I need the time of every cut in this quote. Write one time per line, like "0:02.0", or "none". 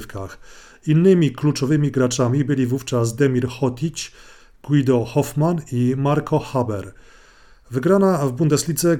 none